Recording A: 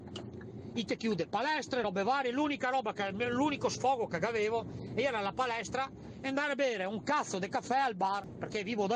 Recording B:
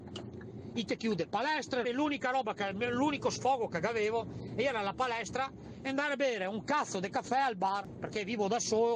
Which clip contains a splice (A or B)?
B